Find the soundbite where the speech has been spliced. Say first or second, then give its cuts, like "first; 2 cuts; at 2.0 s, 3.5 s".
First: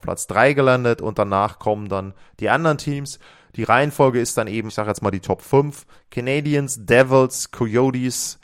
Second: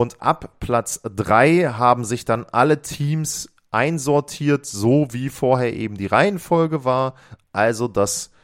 first; 1 cut; at 4.7 s